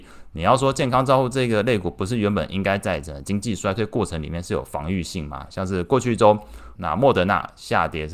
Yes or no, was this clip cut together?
yes